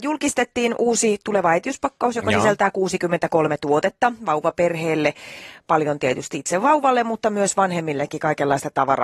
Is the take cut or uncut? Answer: uncut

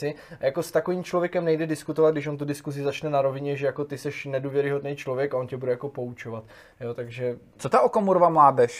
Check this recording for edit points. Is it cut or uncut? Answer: uncut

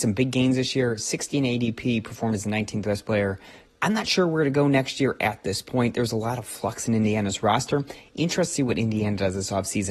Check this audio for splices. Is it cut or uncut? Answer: cut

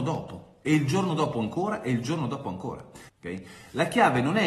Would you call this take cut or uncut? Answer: cut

